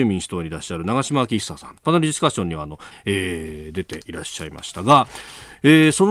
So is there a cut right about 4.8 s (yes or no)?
no